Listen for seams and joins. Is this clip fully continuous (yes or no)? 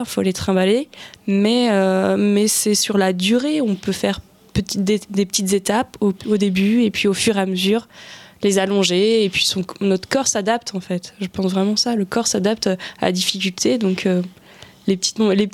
yes